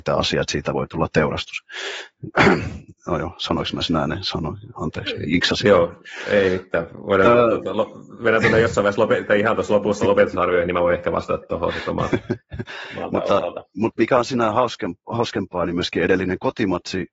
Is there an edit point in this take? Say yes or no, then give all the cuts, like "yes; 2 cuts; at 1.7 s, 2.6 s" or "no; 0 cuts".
no; 0 cuts